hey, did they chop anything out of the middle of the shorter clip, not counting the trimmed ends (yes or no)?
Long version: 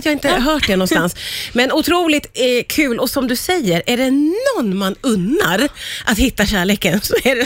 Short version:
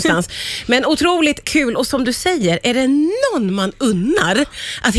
yes